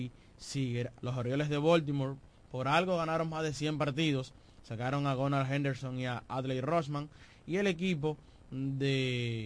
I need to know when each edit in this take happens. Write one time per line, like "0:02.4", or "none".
0:00.9